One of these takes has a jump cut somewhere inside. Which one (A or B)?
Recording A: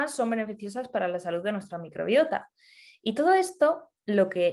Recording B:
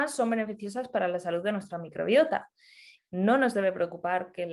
B